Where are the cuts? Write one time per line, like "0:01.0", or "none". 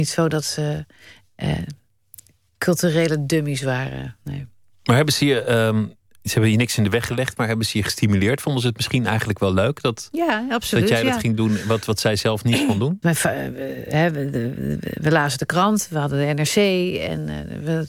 0:13.0